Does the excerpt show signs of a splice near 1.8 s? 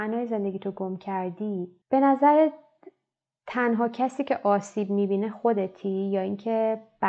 yes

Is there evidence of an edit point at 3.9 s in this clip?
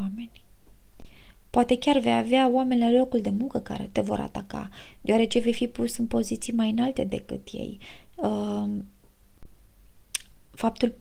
yes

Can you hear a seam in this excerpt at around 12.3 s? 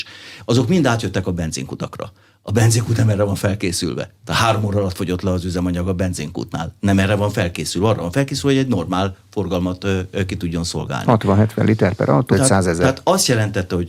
yes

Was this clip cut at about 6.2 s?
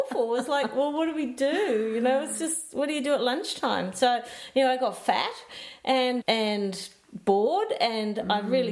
yes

